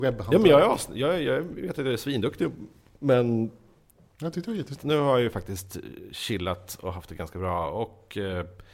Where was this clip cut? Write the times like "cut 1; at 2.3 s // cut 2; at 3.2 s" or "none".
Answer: cut 1; at 4.8 s